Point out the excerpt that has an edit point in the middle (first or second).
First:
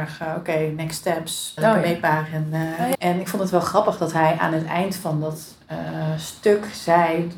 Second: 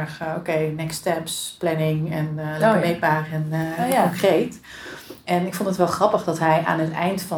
first